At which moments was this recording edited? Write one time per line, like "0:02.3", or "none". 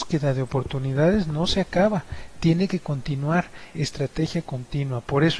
0:03.7